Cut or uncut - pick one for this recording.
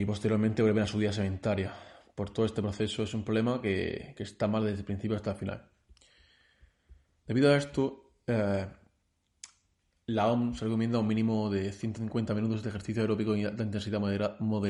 uncut